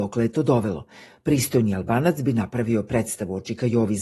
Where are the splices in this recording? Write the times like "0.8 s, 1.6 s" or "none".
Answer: none